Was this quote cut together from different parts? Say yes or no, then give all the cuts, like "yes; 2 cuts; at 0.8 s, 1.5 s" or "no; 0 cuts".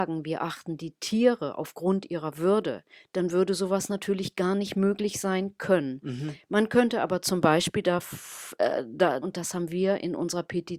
yes; 1 cut; at 9.2 s